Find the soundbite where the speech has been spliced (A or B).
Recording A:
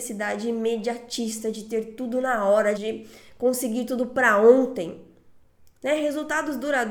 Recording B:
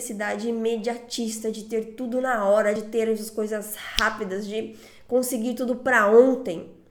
A